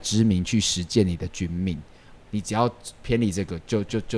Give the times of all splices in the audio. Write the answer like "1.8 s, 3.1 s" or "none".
2.2 s